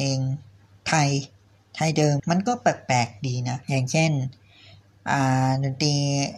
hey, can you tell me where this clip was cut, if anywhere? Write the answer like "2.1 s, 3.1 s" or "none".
2.2 s, 3.6 s